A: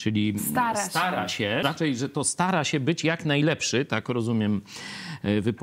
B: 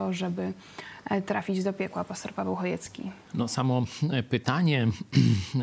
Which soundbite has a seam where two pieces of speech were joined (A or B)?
A